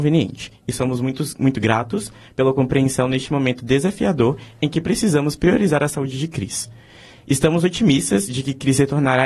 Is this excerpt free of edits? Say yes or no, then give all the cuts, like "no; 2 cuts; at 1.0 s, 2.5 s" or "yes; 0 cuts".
yes; 0 cuts